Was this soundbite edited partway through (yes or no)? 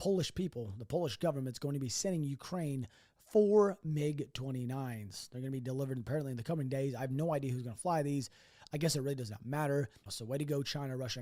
yes